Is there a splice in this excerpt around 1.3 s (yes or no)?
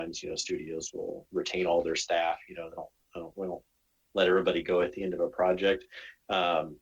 yes